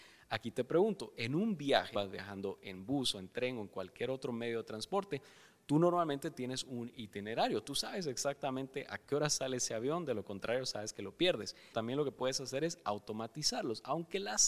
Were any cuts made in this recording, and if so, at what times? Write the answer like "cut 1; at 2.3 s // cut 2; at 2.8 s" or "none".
cut 1; at 1.9 s // cut 2; at 11.7 s